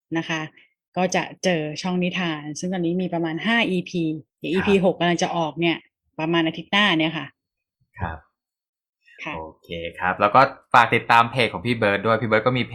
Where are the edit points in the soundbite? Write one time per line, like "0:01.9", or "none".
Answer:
0:04.3